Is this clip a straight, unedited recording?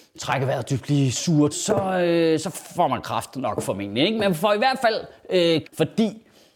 no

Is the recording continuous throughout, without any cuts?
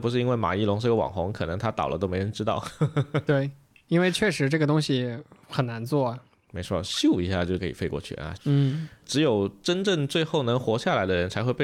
no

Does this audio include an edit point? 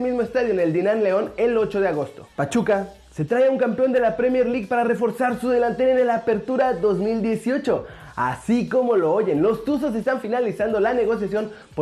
no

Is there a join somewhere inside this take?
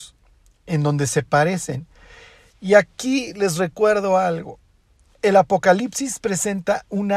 no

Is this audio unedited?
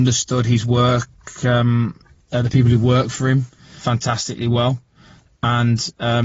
yes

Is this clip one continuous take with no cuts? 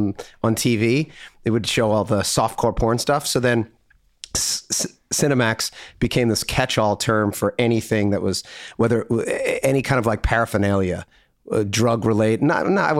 yes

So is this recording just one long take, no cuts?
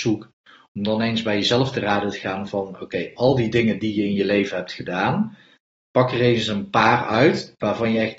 yes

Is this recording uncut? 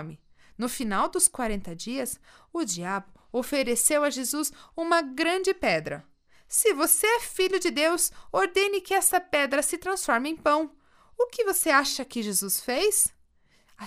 yes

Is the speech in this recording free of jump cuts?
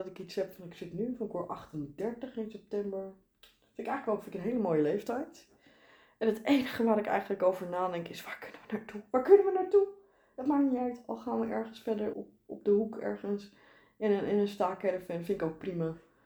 no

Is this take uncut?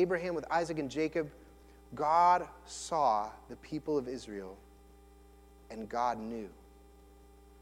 yes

